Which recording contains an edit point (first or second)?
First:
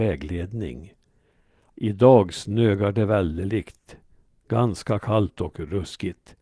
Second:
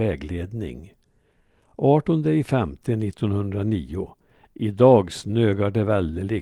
first